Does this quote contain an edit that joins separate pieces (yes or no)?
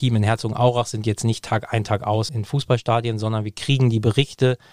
yes